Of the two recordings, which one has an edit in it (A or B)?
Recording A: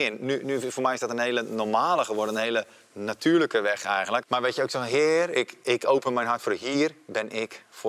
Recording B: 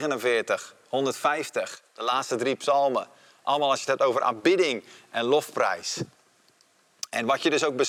A